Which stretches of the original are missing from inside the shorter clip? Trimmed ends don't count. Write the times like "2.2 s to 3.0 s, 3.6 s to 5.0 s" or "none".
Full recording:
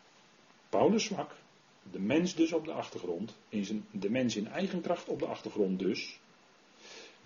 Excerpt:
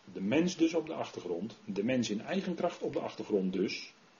3.4 s to 3.9 s